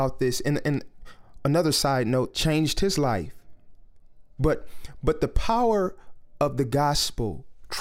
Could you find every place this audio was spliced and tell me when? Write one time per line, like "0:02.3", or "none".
0:02.3
0:04.4